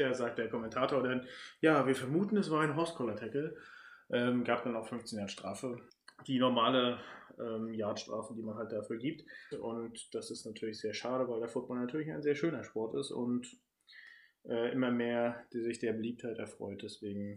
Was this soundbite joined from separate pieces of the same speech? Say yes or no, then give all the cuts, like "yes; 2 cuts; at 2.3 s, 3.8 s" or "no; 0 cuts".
yes; 1 cut; at 9.5 s